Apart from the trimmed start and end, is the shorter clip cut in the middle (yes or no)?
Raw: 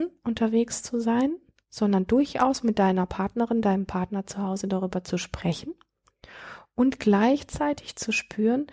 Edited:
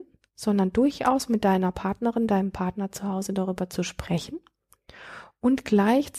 no